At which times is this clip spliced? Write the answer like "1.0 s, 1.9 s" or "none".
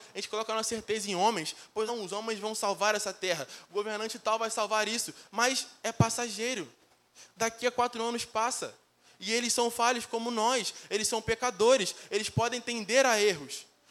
1.9 s